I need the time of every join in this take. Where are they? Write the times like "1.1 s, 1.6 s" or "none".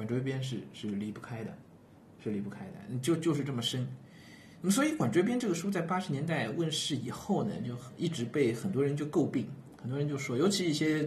none